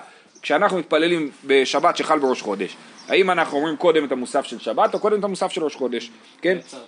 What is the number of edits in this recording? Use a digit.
0